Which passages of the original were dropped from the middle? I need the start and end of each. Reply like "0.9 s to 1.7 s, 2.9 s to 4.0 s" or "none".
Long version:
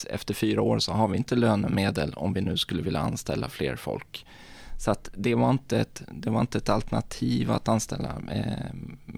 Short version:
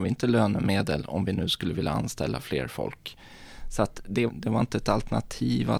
5.3 s to 6.1 s